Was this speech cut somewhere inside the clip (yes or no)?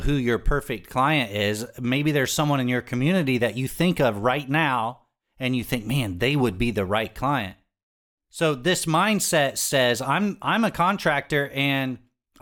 no